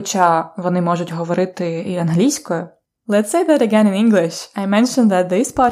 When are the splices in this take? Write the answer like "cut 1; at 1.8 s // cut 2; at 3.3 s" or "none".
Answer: cut 1; at 2.9 s